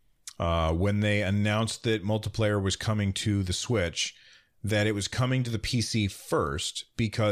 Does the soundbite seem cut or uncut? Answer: uncut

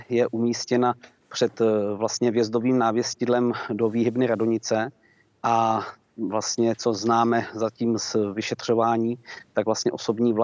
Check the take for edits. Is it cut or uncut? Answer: uncut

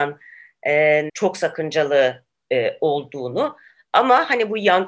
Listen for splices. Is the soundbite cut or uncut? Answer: cut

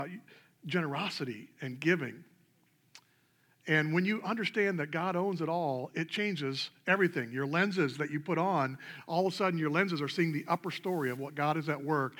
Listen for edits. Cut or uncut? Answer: uncut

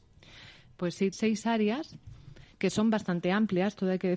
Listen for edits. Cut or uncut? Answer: cut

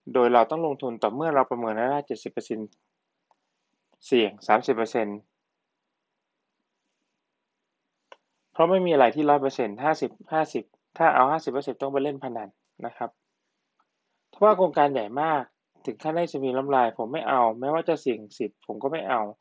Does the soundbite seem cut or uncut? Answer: uncut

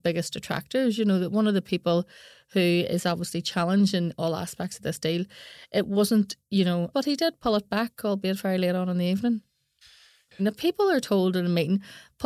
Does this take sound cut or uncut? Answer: cut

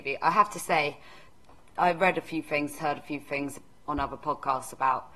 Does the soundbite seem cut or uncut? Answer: uncut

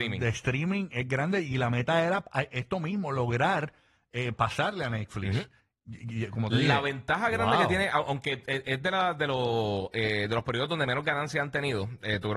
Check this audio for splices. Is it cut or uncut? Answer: uncut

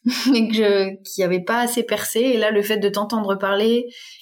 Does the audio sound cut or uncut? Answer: uncut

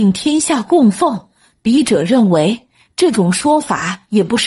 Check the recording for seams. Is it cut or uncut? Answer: uncut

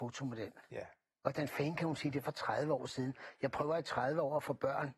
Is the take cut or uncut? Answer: uncut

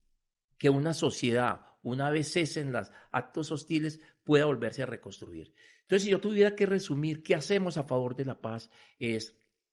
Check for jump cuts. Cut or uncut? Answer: uncut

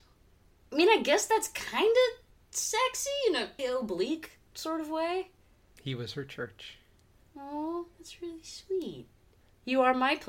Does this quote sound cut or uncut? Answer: cut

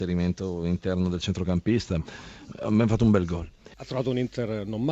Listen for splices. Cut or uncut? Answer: cut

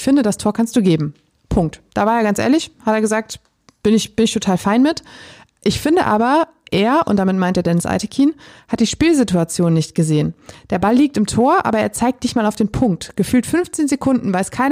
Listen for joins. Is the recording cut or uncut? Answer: uncut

